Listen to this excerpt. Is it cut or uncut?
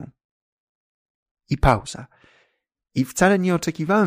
uncut